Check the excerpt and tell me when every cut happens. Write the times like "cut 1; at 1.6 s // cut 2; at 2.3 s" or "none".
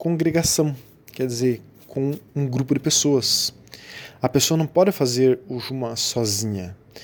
cut 1; at 2.3 s